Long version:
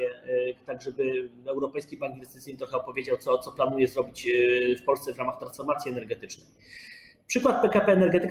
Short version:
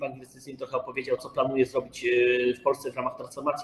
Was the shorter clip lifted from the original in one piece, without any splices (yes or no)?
no